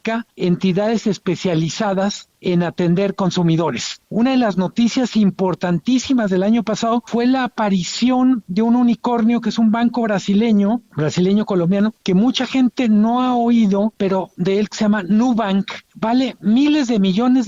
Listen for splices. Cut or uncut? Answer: uncut